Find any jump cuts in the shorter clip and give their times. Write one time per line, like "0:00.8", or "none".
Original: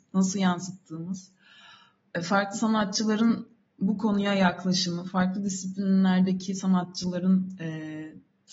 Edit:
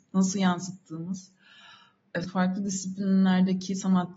0:02.2